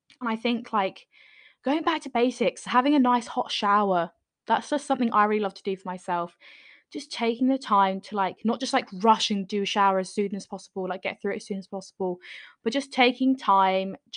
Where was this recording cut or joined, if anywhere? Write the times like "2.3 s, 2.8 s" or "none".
none